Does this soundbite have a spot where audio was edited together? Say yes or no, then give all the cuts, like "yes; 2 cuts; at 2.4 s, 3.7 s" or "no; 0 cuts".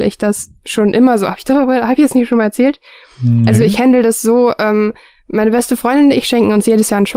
no; 0 cuts